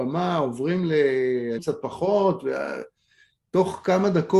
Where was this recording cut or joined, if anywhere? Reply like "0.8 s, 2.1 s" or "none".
1.6 s